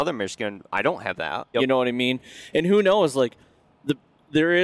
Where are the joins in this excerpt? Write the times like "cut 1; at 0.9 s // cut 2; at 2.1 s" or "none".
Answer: cut 1; at 1.5 s